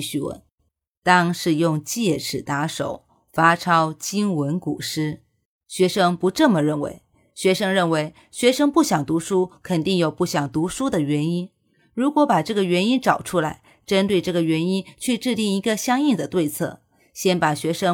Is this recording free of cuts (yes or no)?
yes